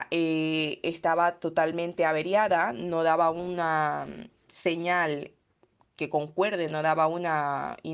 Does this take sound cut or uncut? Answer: uncut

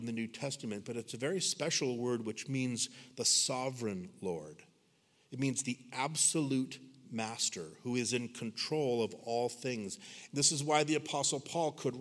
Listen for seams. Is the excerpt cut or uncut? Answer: cut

